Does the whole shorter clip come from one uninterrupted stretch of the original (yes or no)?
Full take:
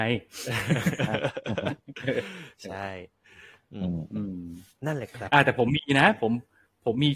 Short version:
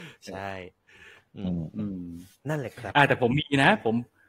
yes